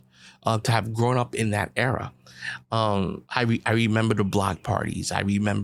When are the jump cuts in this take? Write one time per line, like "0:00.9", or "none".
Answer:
0:03.2